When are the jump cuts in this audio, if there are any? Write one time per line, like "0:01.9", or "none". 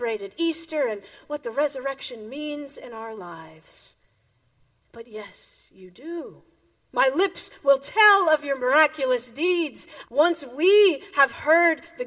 0:04.8
0:06.9
0:10.0